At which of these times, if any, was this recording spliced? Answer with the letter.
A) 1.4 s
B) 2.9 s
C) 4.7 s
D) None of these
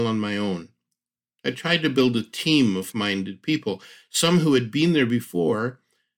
B